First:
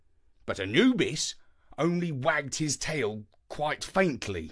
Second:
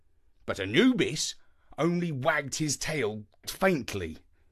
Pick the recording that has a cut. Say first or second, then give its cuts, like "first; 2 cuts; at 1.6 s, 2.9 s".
second; 1 cut; at 3.4 s